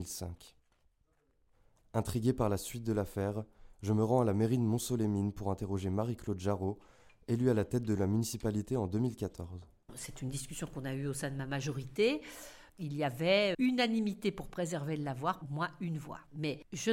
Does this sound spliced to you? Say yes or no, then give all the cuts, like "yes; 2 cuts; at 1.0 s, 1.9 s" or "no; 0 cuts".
yes; 2 cuts; at 13.5 s, 15.4 s